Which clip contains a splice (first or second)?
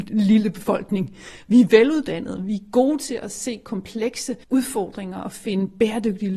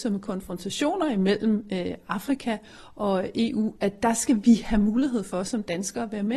first